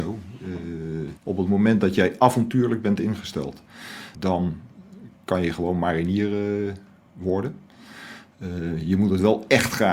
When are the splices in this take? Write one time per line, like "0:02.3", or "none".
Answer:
0:01.2
0:04.2